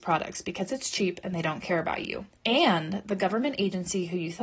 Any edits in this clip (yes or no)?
yes